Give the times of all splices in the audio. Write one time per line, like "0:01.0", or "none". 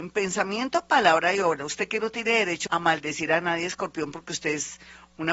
0:02.7